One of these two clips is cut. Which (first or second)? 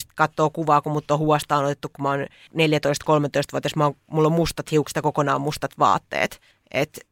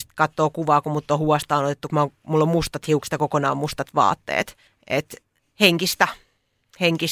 second